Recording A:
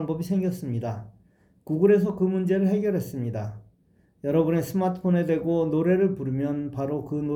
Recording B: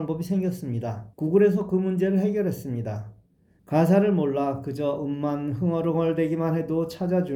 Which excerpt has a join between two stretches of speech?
B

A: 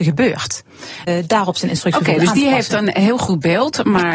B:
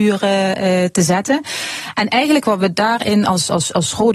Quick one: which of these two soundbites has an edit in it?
A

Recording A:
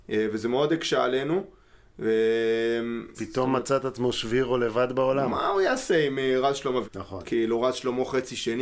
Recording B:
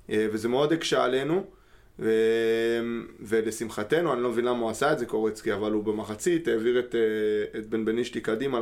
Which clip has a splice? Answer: A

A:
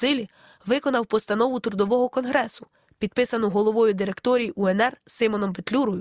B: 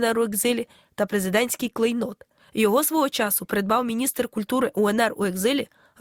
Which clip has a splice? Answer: B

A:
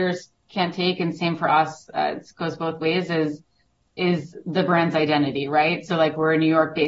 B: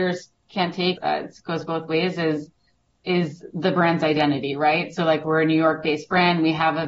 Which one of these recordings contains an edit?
B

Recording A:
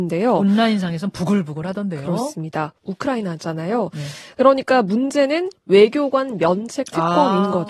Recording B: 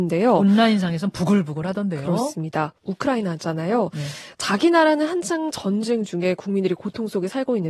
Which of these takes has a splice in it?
A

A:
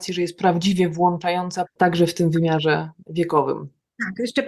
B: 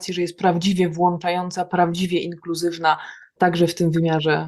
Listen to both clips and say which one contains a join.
A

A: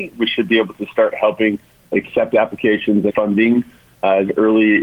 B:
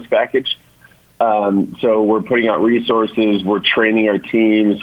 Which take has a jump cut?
A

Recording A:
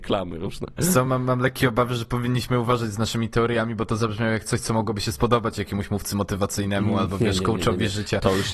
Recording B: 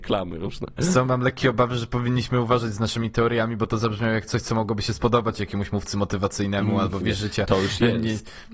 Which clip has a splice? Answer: B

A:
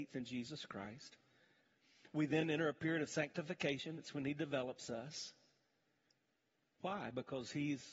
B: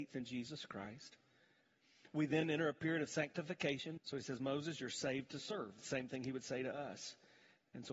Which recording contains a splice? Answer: B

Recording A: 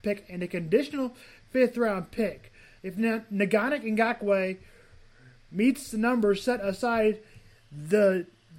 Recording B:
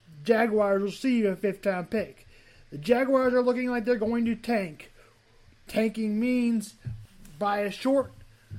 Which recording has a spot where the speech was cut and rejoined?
A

